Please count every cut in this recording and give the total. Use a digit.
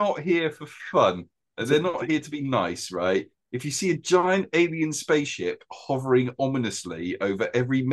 0